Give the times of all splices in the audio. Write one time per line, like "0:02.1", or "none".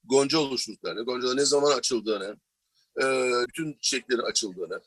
0:03.5